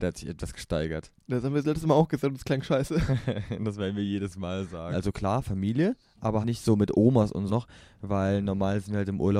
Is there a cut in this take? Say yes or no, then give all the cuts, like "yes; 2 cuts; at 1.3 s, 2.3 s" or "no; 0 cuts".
yes; 3 cuts; at 4.9 s, 6.4 s, 7.5 s